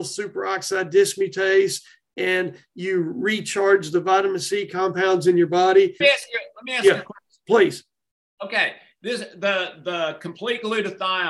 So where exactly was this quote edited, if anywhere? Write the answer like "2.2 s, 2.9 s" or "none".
6.0 s